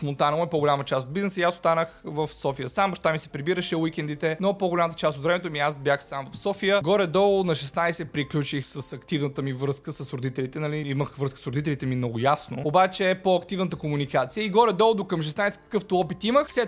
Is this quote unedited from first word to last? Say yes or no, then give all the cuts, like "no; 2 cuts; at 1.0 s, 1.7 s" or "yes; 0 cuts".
yes; 0 cuts